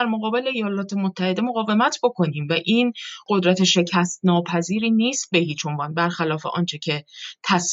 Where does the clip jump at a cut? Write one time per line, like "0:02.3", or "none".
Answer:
0:03.3